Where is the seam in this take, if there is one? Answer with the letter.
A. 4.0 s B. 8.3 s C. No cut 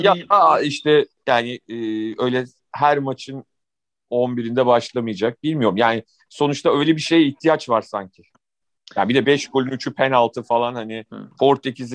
B